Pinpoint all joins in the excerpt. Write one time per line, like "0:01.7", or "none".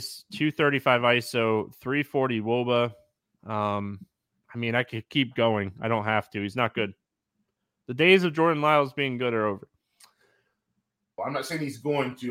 0:11.2